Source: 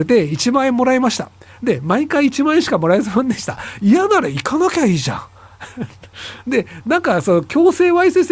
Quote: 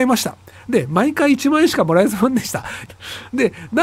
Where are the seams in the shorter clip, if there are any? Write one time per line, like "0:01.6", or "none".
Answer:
0:02.9